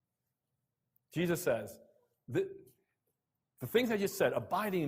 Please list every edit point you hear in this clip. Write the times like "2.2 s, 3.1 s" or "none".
none